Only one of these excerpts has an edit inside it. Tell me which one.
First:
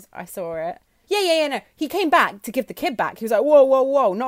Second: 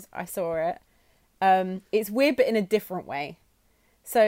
first; 1 cut; at 1.0 s

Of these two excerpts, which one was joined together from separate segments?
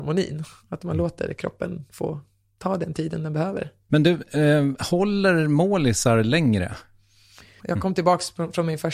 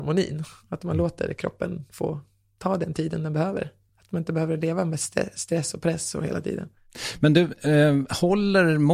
first; 2 cuts; at 3.9 s, 7.6 s

